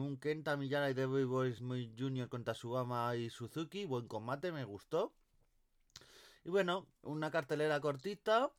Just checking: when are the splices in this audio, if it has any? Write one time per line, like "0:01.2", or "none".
none